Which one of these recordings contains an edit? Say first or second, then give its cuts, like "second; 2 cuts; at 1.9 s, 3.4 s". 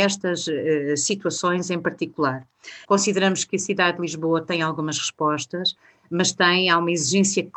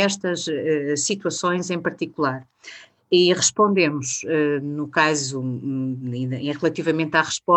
first; 1 cut; at 2.8 s